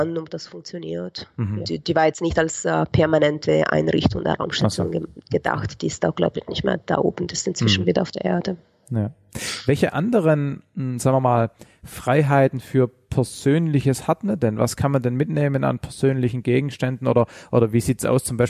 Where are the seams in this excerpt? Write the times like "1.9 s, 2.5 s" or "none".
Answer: 1.6 s